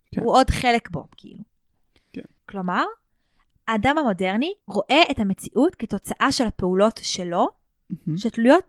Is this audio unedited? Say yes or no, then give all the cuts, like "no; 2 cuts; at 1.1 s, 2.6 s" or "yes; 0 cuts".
no; 2 cuts; at 2.4 s, 4.6 s